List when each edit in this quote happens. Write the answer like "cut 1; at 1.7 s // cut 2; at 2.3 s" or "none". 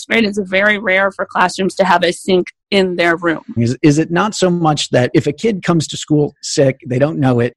cut 1; at 3.6 s